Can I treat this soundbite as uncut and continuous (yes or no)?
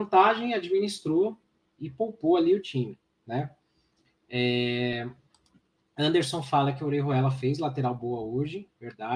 yes